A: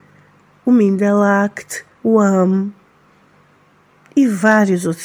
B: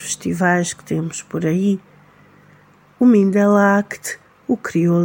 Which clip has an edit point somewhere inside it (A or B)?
A